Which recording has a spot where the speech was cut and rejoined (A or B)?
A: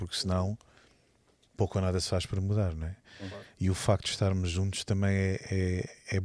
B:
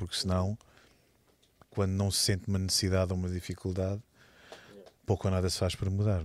A